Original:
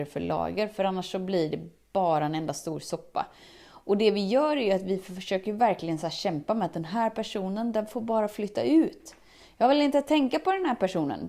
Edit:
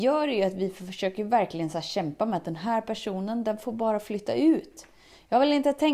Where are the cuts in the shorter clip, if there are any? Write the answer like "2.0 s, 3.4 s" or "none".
none

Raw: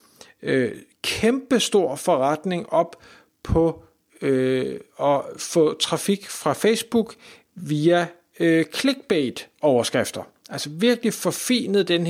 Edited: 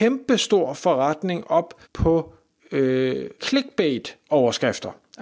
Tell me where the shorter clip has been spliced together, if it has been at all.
1.8 s, 3.4 s

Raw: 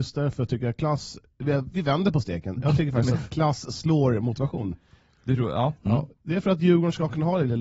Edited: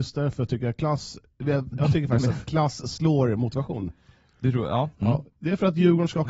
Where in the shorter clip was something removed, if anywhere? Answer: 1.7 s

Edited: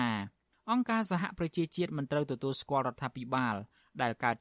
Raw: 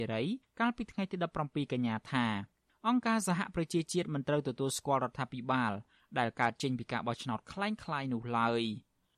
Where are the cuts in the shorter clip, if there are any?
none

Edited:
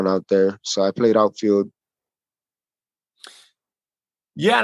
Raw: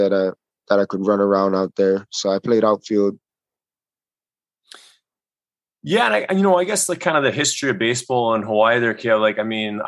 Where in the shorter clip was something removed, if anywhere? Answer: none

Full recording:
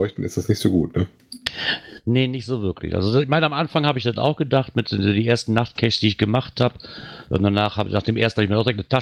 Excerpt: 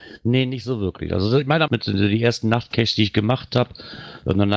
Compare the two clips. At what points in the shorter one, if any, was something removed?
1.7 s

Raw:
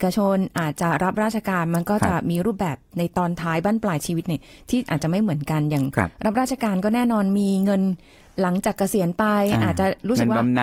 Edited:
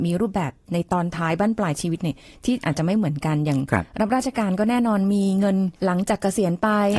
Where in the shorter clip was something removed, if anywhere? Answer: 5.8 s

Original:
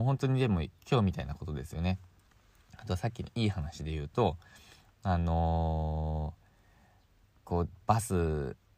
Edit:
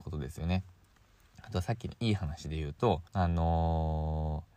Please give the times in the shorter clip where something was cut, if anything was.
3.1 s

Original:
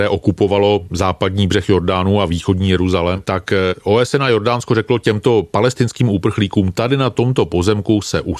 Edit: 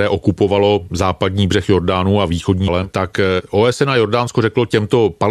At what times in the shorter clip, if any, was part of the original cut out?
2.7 s

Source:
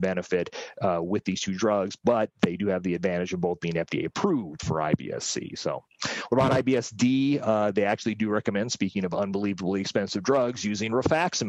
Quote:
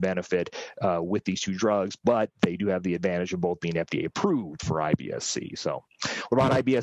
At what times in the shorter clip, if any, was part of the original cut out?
none

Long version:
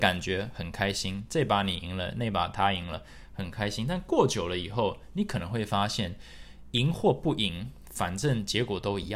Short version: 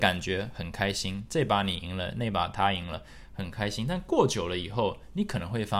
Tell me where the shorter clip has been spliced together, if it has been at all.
none

